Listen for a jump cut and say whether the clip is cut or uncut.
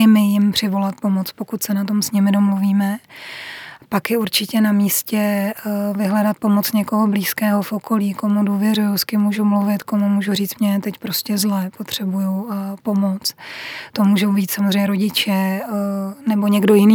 uncut